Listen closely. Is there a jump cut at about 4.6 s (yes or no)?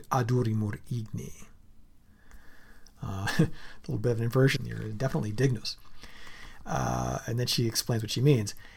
yes